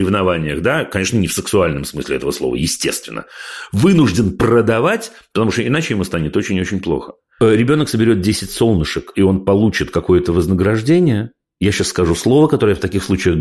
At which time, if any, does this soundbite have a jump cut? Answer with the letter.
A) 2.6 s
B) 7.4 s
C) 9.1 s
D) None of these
B